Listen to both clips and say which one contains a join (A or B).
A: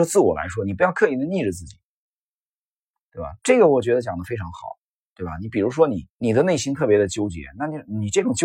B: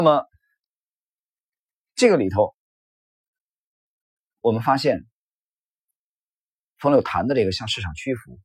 A